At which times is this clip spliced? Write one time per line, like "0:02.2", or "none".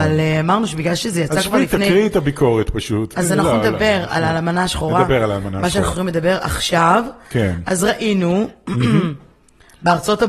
0:03.1

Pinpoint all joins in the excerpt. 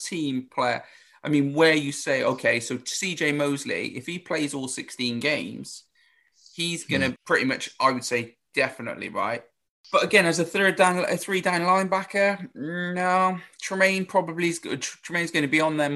0:07.1

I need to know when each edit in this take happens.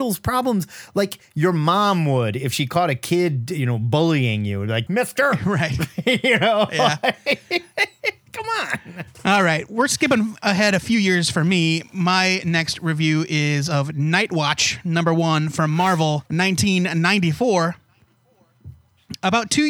0:04.9
0:16.3

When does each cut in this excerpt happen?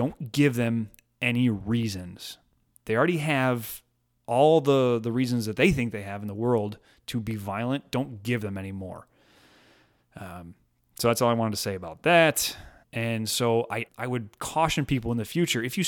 0:12.8
0:13.9

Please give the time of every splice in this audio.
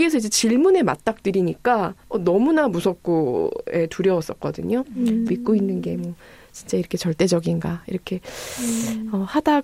0:02.0
0:05.3

